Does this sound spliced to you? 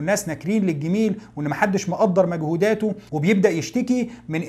no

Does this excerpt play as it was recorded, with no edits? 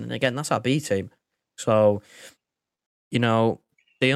yes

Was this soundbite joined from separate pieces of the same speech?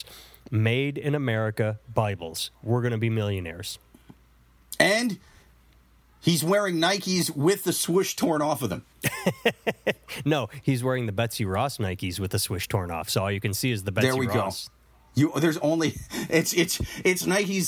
no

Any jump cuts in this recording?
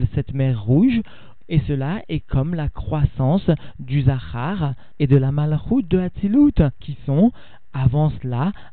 yes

